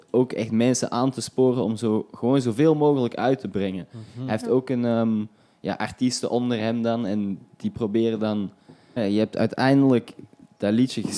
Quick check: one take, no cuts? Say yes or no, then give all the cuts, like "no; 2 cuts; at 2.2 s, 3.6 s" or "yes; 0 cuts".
no; 1 cut; at 9.0 s